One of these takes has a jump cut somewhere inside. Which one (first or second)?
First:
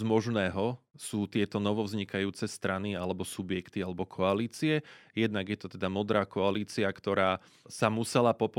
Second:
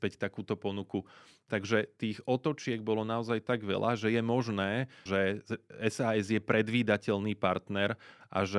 second